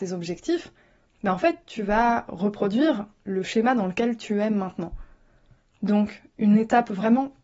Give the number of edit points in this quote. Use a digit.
0